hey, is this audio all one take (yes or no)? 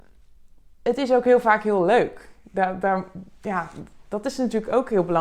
yes